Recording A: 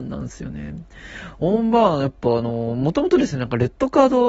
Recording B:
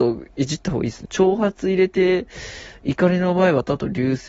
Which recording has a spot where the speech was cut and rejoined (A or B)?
B